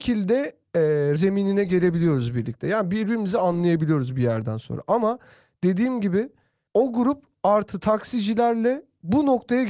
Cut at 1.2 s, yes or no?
yes